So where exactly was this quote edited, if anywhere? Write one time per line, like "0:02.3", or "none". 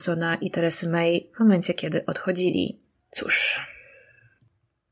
none